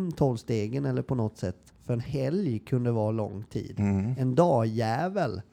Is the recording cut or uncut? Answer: cut